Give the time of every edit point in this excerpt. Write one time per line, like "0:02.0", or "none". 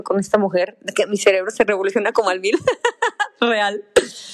none